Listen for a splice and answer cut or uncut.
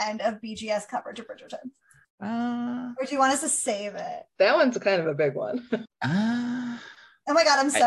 cut